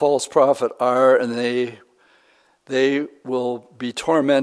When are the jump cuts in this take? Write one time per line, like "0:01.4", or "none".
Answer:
none